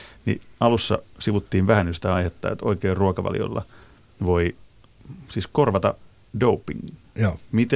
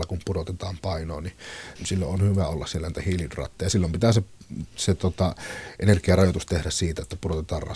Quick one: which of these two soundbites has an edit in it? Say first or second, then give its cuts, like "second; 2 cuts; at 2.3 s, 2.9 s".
second; 1 cut; at 1.8 s